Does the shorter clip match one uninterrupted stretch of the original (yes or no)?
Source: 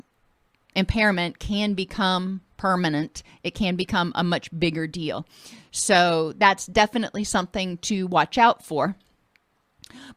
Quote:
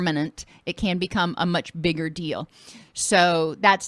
yes